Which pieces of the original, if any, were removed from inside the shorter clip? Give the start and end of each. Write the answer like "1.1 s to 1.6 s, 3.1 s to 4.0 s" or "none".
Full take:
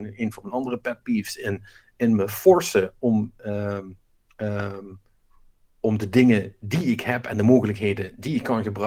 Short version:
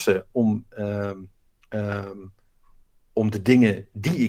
none